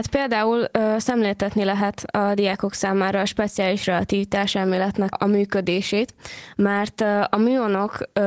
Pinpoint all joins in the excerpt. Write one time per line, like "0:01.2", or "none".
0:05.1